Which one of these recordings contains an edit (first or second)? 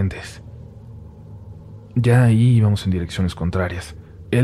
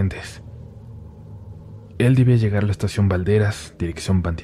second